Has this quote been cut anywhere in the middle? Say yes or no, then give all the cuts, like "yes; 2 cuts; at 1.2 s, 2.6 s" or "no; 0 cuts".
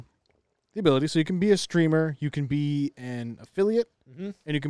no; 0 cuts